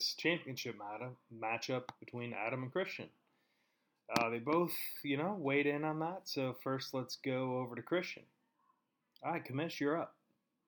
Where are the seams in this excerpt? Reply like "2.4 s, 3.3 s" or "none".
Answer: none